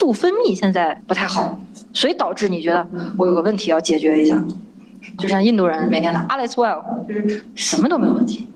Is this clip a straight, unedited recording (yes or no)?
no